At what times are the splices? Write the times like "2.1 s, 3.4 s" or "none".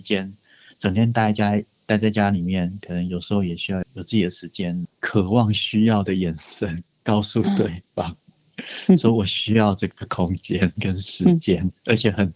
3.8 s, 4.9 s